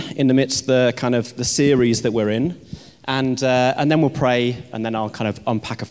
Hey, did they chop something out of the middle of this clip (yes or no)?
no